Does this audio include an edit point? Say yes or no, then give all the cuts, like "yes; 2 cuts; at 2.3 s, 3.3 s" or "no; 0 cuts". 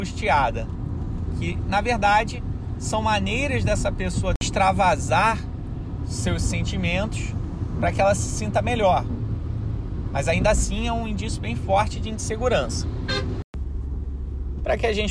no; 0 cuts